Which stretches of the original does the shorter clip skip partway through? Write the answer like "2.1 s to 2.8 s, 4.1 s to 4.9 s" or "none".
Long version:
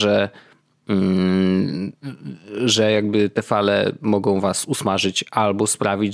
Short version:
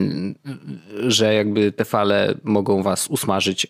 none